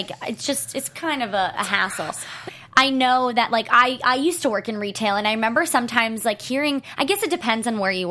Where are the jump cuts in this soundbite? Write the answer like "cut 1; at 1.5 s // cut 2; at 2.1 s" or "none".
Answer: cut 1; at 2.5 s